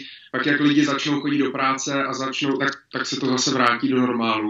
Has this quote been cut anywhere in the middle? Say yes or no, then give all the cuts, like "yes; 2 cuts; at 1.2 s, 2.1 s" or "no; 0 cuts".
no; 0 cuts